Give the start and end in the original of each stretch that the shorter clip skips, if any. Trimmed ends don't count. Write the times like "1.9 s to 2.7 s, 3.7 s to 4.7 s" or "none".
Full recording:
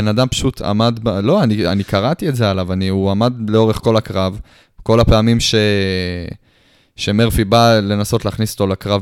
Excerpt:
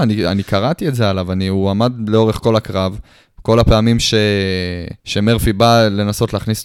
6.4 s to 6.9 s